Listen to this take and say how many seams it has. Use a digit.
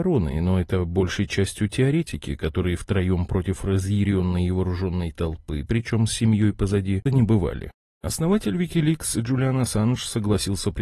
1